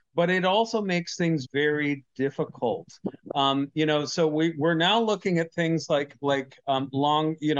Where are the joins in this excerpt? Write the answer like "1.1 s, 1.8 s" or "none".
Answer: 1.4 s

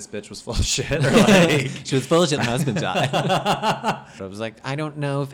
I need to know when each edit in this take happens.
2.4 s, 4.2 s

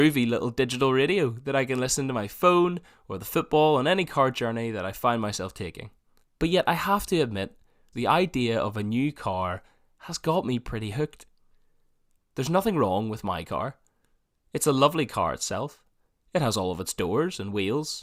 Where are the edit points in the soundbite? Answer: 6.2 s, 7.9 s, 12.2 s

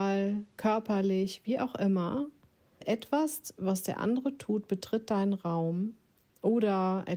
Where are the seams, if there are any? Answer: 2.8 s

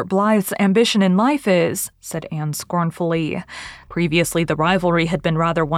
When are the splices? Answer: 1.9 s, 3.9 s

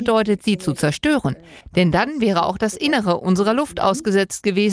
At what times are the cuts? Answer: none

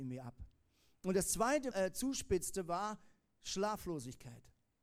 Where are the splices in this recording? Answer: 1.7 s

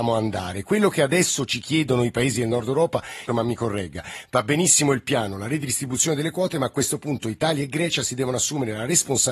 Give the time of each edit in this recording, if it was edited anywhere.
3.3 s

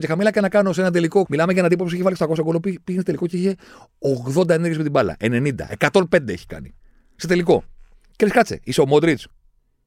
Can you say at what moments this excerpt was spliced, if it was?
1.3 s

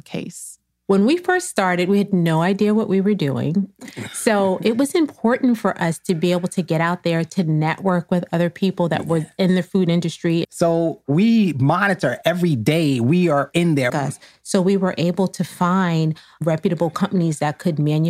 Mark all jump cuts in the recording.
10.4 s, 13.9 s

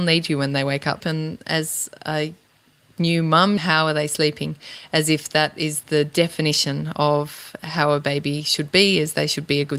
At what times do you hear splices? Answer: 1.0 s, 3.6 s

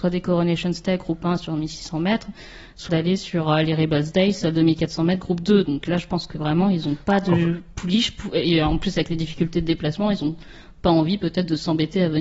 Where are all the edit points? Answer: 2.9 s

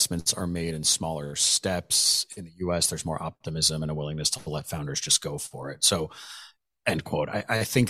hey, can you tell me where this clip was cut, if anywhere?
none

